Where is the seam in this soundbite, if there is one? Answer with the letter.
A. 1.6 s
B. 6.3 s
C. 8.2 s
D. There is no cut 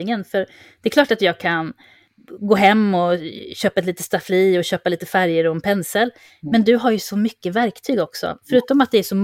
D